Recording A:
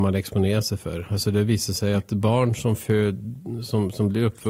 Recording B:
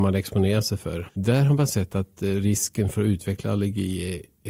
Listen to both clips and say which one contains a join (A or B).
B